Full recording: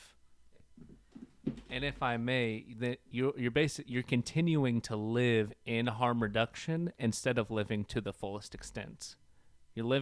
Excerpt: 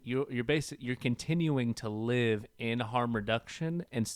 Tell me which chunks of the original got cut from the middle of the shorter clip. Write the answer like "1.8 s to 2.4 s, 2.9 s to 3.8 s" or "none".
none